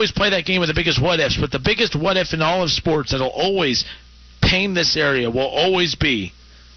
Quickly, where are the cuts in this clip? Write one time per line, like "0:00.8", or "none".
none